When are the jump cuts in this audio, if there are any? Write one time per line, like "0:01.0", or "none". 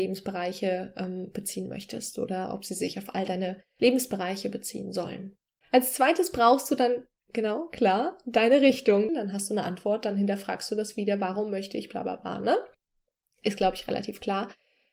0:05.6
0:09.1